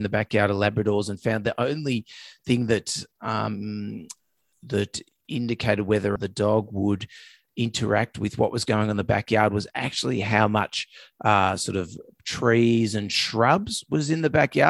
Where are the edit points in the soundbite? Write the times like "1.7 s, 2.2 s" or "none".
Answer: 6.2 s